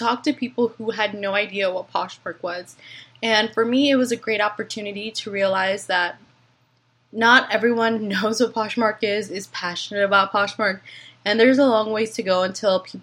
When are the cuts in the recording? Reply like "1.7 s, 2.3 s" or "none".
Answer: none